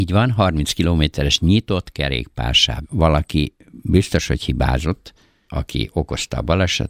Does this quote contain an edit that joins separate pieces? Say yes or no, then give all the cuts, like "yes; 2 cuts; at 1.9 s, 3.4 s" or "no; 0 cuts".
yes; 2 cuts; at 2.8 s, 5.5 s